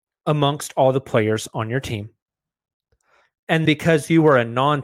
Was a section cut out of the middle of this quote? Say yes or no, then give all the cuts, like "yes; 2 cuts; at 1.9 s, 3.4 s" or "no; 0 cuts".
yes; 1 cut; at 3.6 s